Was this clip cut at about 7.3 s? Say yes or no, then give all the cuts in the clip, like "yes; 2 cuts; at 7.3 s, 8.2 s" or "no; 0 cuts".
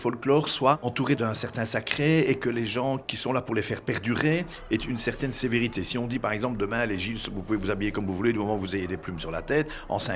no; 0 cuts